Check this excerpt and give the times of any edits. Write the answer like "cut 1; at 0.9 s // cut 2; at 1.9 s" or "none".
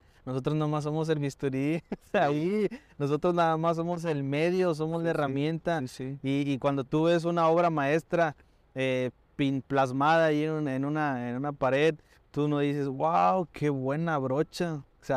none